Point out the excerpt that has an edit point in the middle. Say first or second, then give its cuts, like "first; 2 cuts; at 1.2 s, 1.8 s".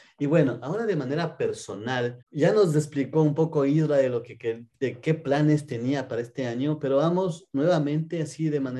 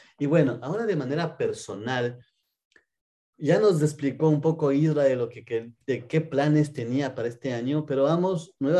first; 1 cut; at 2.2 s